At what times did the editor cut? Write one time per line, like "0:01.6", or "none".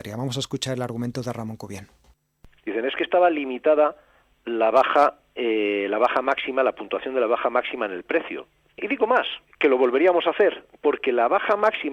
0:08.7